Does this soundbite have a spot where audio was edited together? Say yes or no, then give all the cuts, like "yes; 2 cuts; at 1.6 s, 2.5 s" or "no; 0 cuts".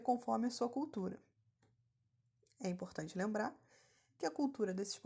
no; 0 cuts